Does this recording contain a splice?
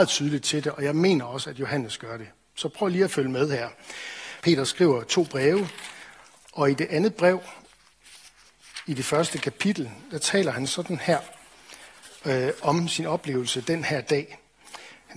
yes; 1 cut; at 4.4 s

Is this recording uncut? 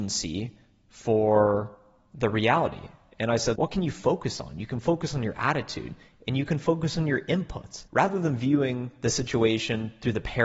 no; 2 cuts; at 3.6 s, 7.9 s

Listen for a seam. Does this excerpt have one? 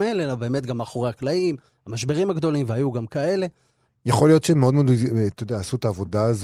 yes; 1 cut; at 3.9 s

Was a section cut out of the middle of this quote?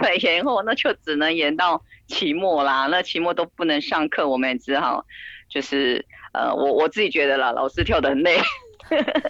no; 0 cuts

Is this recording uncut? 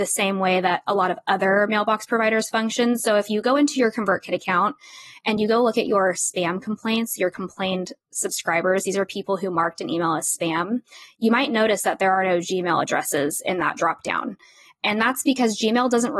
yes; 0 cuts

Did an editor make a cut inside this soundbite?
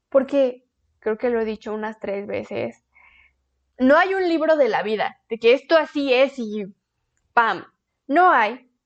yes; 2 cuts; at 1.0 s, 7.9 s

